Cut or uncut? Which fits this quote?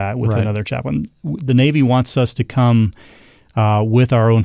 uncut